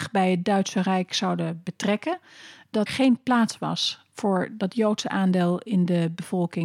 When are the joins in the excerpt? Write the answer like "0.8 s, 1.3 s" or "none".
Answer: 2.9 s

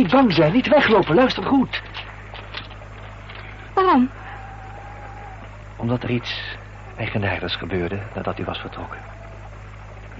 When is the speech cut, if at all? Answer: 3.7 s

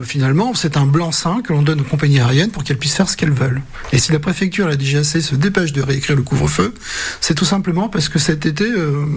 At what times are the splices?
none

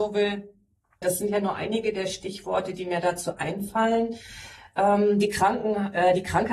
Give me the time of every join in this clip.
1.0 s

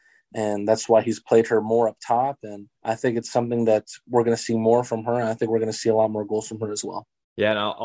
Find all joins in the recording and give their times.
2.7 s

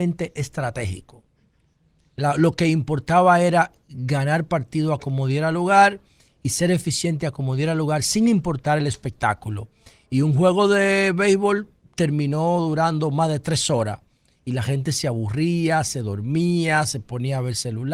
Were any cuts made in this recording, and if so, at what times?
none

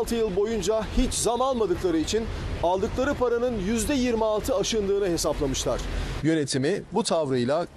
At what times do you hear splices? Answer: 6.2 s

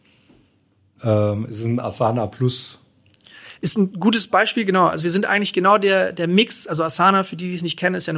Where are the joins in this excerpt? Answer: none

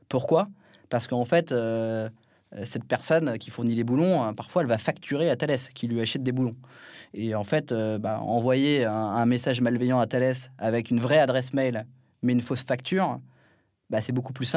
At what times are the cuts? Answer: none

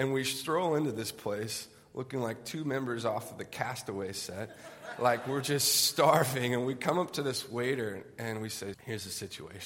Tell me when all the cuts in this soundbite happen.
8.7 s

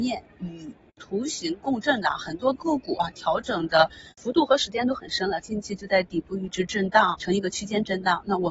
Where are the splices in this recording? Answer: 5.4 s, 7.1 s

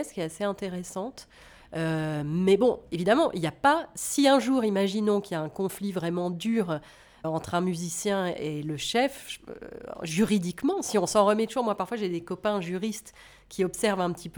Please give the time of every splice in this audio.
7.2 s

